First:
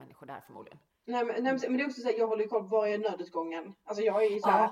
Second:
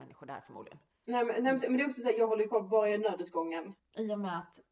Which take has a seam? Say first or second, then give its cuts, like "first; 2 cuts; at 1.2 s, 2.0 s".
second; 1 cut; at 3.8 s